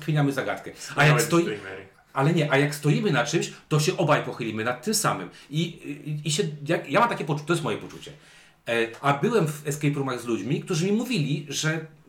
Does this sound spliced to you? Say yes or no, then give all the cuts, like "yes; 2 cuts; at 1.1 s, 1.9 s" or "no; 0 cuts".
no; 0 cuts